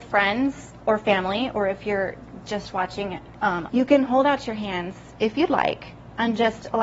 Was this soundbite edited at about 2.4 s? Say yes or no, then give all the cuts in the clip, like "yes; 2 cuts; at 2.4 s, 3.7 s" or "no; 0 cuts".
no; 2 cuts; at 3.7 s, 5.1 s